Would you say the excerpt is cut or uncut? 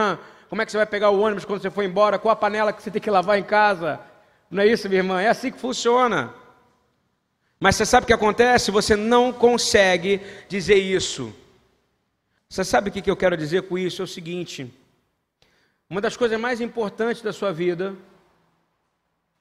cut